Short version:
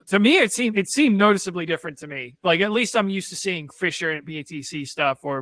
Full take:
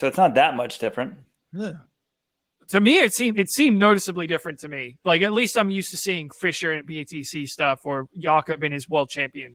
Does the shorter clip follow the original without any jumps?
yes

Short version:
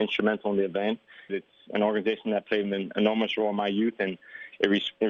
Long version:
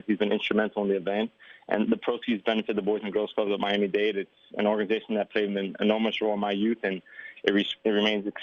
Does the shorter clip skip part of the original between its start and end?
yes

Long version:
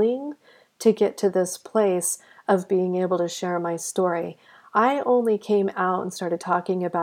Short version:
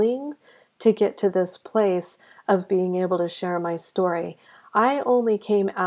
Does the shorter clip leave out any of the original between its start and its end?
no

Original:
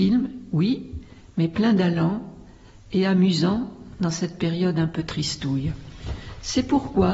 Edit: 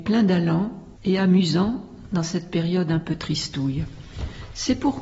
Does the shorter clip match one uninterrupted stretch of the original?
no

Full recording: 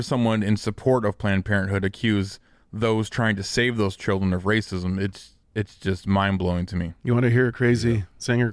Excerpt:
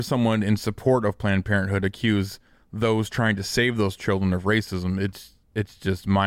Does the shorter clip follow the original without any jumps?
yes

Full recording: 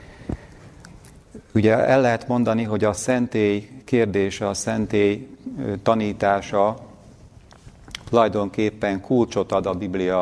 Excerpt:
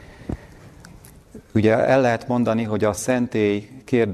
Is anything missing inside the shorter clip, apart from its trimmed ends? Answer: no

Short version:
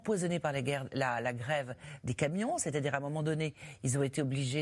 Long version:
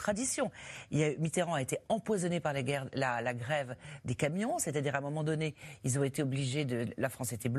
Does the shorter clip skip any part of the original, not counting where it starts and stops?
no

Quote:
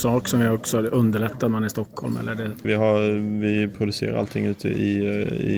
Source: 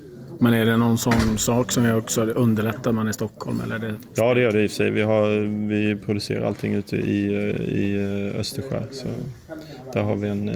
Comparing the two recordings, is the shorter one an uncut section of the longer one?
no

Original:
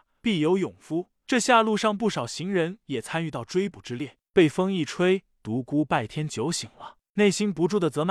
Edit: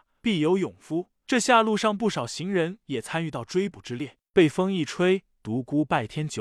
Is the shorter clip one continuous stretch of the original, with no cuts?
yes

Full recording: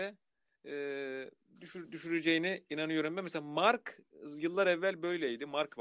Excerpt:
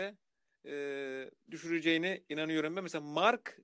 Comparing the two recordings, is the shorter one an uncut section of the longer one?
no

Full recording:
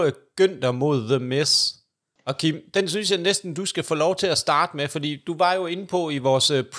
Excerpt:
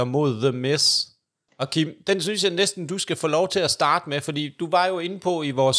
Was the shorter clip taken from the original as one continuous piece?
yes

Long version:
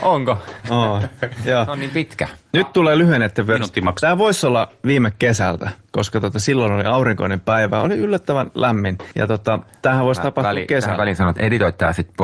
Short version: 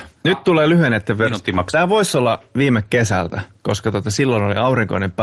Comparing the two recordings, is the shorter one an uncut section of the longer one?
yes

